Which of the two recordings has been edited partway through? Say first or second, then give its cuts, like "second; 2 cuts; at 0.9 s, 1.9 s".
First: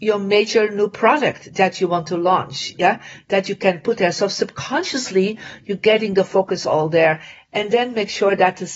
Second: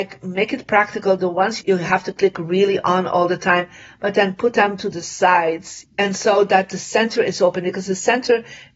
second; 1 cut; at 5.8 s